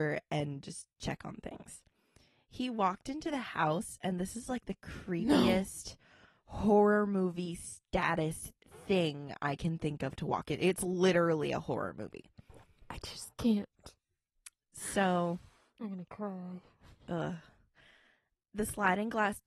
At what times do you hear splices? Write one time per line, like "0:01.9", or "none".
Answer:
none